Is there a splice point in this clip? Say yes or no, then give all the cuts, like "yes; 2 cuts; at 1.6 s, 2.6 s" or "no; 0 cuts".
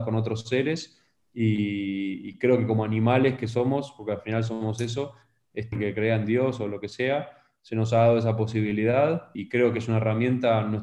yes; 2 cuts; at 5.7 s, 9.3 s